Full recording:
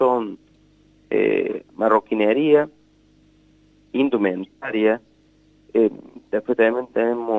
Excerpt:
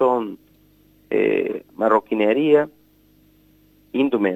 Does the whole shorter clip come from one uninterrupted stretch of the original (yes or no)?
yes